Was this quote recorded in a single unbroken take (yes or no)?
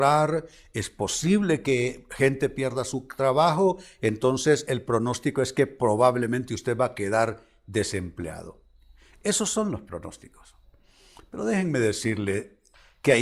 yes